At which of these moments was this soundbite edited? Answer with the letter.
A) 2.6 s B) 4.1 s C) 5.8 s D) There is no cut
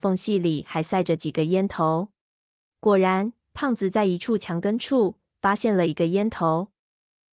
A